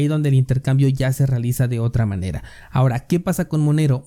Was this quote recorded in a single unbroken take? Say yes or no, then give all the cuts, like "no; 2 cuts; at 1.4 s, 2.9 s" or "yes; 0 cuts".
yes; 0 cuts